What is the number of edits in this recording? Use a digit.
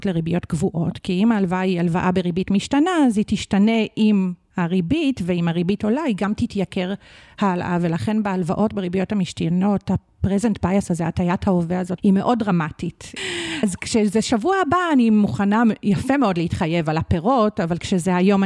2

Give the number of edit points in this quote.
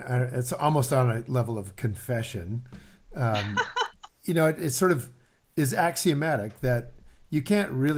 1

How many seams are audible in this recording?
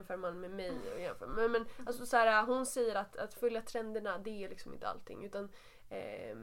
0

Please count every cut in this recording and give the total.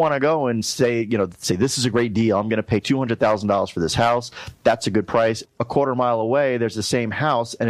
1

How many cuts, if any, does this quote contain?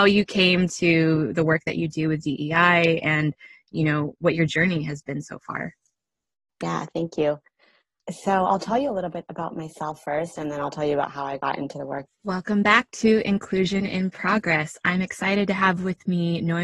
1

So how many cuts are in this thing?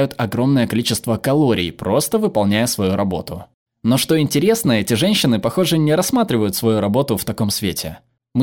0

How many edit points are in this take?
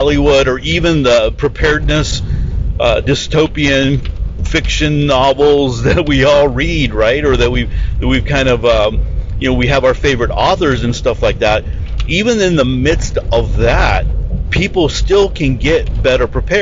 0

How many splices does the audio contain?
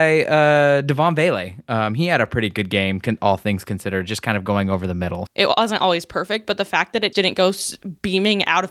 2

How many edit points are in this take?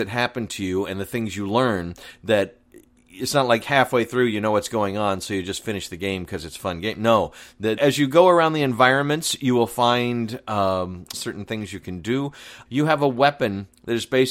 3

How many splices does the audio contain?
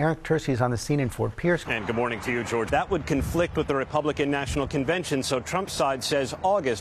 2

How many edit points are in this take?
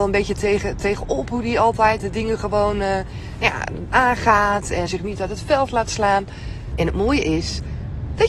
2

